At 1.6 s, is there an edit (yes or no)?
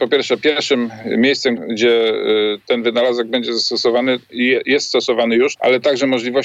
yes